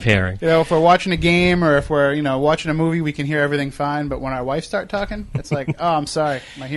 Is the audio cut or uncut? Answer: uncut